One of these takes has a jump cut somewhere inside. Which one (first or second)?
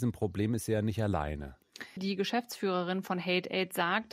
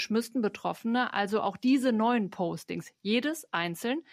first